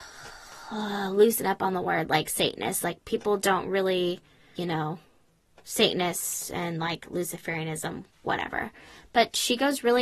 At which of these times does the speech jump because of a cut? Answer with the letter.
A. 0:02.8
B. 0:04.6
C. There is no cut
B